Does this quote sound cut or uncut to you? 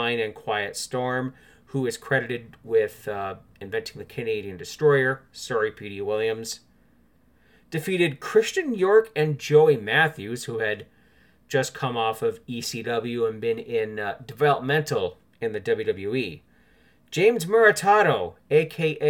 uncut